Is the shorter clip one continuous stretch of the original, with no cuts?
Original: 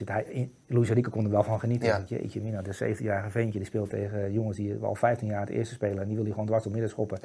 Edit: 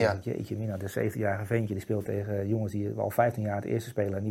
yes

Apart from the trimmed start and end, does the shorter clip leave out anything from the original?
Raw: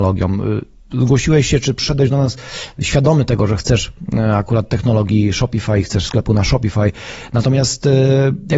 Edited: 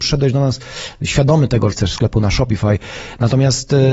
yes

